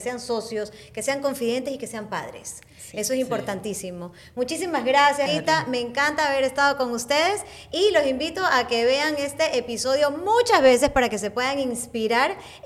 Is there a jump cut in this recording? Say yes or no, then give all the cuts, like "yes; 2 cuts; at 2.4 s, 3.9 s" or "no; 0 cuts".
yes; 1 cut; at 5.3 s